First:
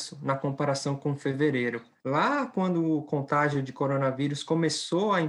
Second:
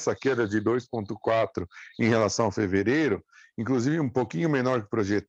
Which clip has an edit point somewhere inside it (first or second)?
first